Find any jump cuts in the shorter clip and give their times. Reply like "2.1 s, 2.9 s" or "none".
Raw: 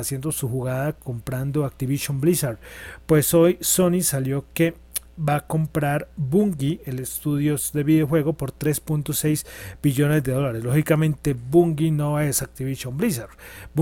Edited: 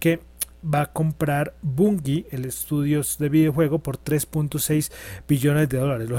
none